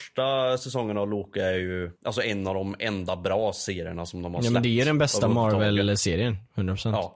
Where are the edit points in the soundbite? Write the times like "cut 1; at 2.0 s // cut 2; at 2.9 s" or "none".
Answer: cut 1; at 2.0 s